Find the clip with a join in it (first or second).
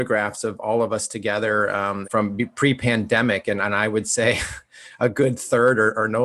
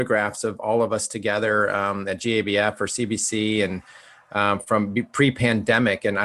first